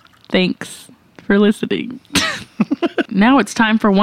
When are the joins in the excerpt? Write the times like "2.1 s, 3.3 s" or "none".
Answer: 3.1 s